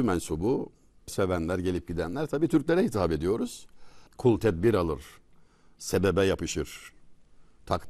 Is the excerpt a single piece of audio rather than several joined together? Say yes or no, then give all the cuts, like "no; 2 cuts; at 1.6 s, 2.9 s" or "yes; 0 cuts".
no; 2 cuts; at 1.1 s, 4.1 s